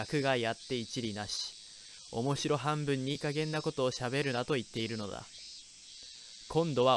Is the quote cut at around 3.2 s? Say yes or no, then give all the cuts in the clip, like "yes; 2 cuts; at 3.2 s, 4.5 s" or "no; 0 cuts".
yes; 1 cut; at 3.2 s